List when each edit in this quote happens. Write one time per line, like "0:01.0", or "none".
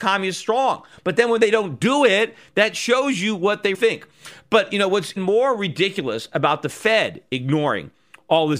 0:03.7
0:05.2